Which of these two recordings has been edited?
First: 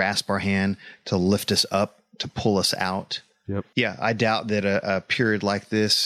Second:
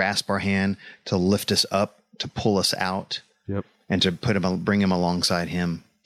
first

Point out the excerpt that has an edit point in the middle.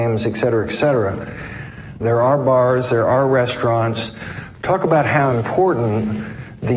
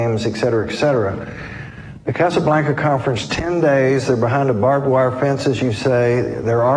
first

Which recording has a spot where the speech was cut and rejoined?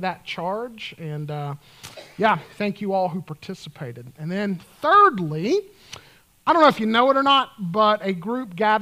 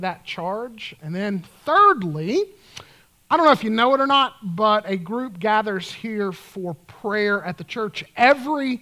second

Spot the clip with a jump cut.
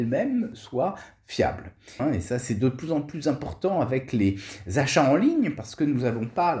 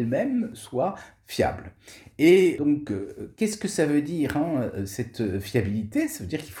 first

